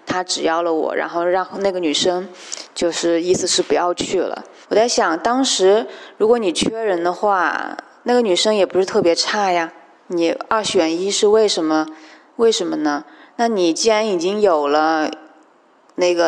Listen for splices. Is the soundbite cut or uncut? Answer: cut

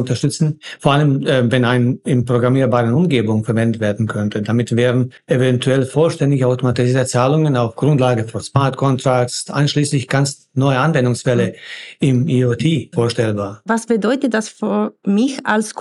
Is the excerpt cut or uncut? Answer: uncut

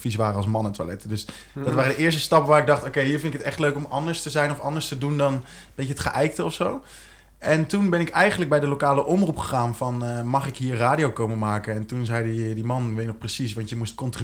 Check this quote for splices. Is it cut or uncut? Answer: uncut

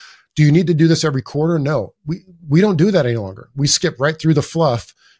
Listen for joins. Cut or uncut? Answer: uncut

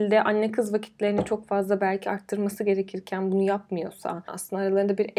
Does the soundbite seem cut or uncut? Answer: cut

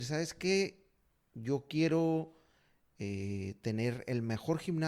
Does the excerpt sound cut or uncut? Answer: uncut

